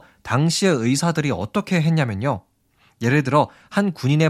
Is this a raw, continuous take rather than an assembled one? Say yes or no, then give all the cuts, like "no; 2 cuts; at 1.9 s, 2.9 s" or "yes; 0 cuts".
yes; 0 cuts